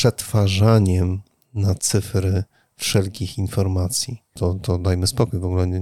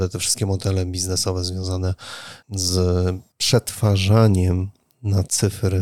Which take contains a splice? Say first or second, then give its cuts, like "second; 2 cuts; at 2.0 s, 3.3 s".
first; 1 cut; at 4.4 s